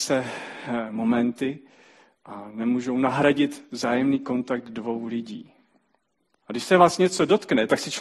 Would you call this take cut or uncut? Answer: cut